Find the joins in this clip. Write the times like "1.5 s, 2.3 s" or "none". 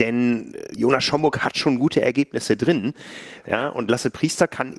3.4 s